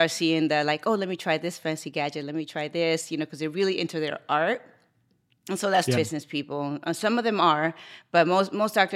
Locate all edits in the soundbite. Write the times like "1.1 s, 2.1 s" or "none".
5.9 s